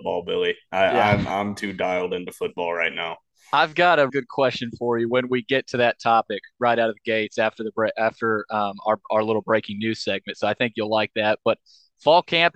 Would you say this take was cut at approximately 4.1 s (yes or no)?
yes